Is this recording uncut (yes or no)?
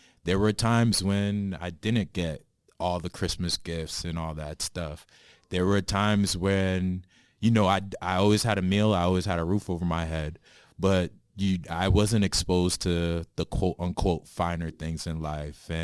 yes